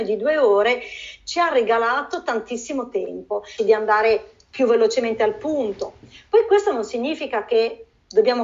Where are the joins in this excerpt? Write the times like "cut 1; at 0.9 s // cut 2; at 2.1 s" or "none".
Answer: cut 1; at 3.6 s